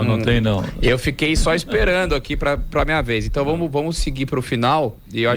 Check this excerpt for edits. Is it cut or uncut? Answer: uncut